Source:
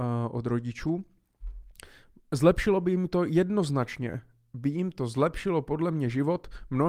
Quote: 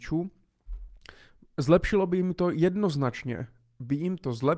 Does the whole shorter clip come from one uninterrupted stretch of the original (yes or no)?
yes